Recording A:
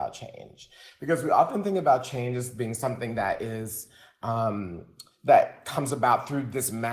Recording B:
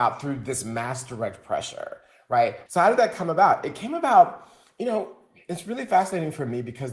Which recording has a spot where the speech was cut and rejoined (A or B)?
B